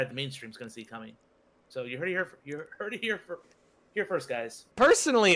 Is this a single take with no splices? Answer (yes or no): yes